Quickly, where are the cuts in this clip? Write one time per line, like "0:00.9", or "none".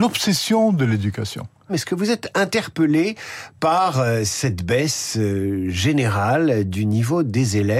0:01.7